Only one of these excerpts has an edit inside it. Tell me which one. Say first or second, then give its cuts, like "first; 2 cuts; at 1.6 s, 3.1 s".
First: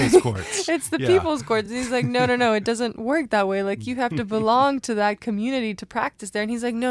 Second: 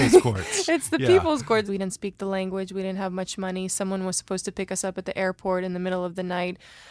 second; 1 cut; at 1.7 s